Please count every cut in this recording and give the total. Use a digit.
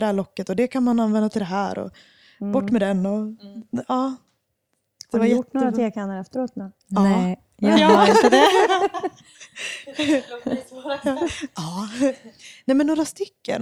0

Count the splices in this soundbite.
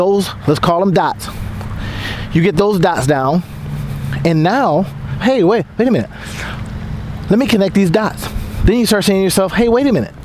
1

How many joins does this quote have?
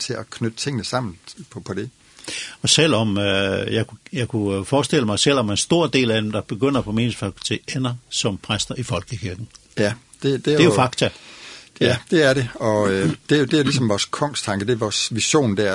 0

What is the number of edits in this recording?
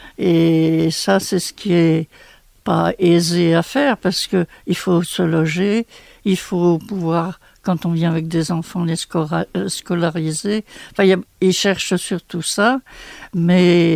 0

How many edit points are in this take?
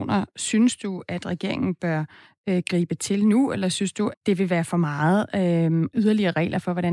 2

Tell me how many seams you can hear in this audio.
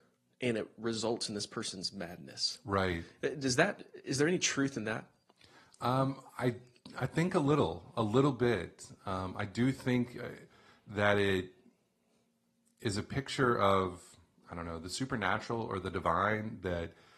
0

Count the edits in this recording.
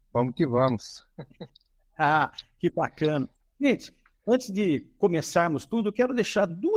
0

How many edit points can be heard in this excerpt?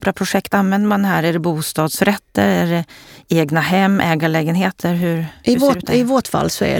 0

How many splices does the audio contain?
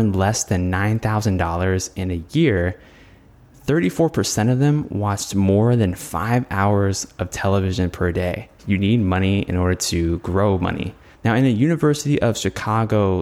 2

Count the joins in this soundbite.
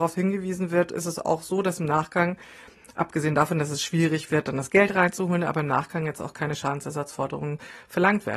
0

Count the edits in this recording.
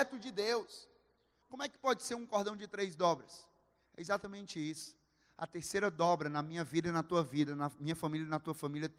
1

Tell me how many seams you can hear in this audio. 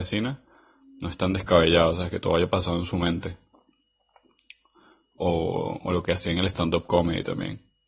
0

